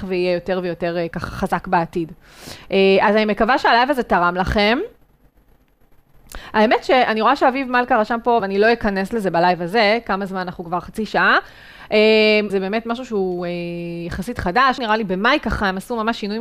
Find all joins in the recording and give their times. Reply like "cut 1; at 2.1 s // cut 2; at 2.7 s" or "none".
cut 1; at 8.4 s // cut 2; at 12.5 s // cut 3; at 14.8 s